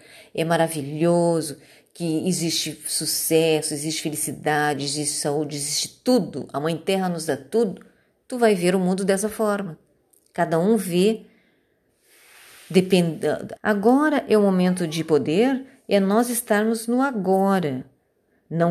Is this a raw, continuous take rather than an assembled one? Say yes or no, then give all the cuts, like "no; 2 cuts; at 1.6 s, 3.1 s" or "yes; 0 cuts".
no; 1 cut; at 13.6 s